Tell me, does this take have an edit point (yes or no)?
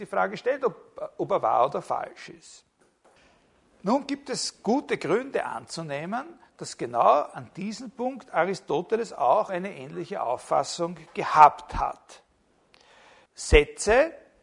yes